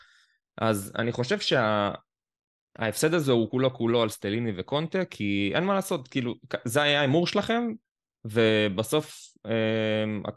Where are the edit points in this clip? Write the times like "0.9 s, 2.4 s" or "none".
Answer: 3.5 s